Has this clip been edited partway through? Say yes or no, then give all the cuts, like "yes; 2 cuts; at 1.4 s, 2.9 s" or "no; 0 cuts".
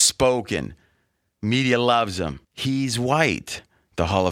yes; 1 cut; at 2.4 s